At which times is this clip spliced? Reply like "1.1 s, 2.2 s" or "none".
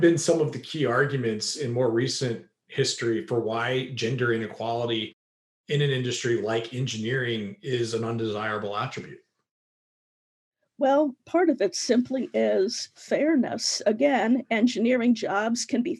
none